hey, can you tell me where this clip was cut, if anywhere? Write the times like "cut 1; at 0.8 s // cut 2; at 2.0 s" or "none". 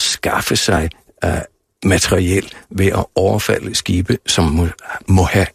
none

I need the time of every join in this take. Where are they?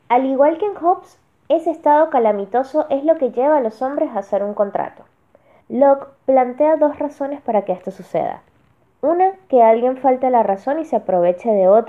cut 1; at 5.6 s

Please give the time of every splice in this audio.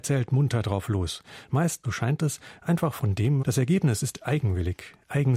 cut 1; at 1.8 s // cut 2; at 3.4 s

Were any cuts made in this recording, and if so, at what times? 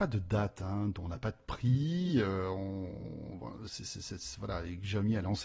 none

